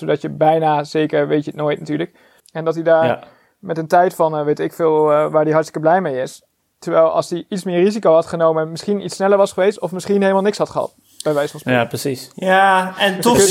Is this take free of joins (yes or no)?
no